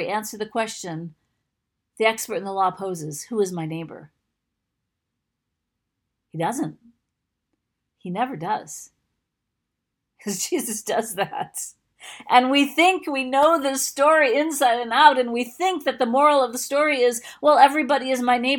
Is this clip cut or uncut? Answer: uncut